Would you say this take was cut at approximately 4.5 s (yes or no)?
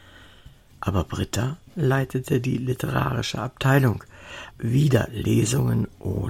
yes